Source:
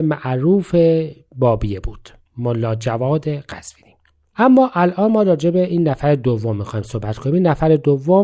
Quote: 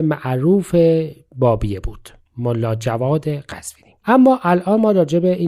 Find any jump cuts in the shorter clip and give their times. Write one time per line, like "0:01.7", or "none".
0:04.0